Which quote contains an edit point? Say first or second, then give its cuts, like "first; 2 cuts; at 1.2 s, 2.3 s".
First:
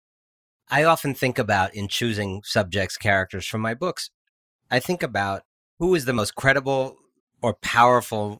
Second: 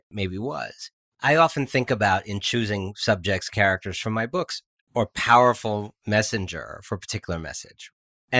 second; 2 cuts; at 1.0 s, 4.9 s